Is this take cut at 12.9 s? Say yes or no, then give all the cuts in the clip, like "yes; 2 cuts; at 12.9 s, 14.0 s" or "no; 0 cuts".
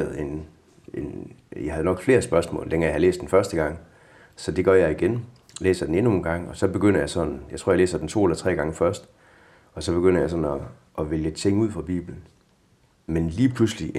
yes; 1 cut; at 12.9 s